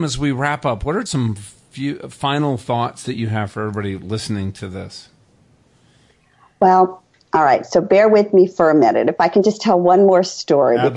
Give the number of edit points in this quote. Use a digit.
1